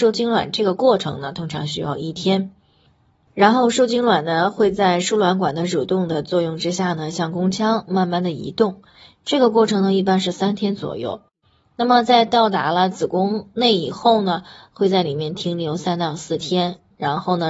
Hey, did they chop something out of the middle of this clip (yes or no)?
no